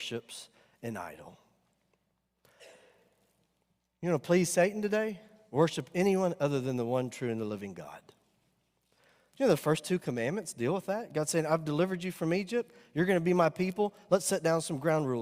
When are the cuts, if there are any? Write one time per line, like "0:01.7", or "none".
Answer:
none

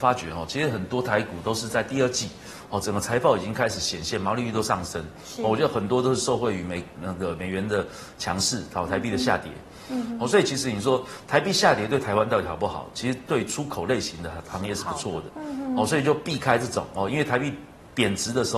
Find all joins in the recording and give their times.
0:15.3
0:17.1

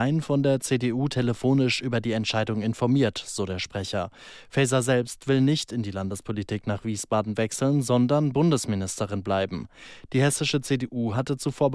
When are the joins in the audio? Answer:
none

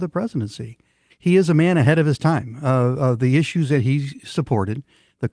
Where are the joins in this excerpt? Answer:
0:01.1

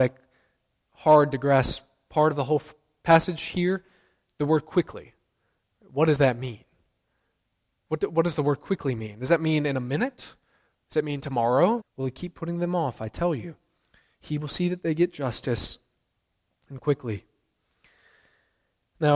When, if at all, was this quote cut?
0:11.8

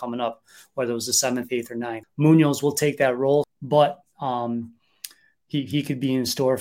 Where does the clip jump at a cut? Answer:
0:02.0
0:03.4

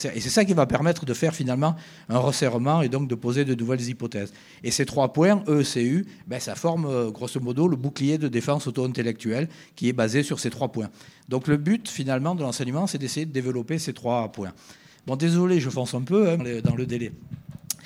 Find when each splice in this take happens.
0:16.4

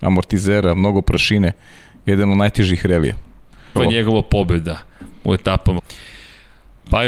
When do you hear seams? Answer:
0:03.8
0:05.8

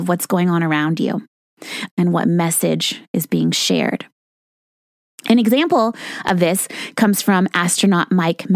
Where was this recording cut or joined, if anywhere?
0:01.9

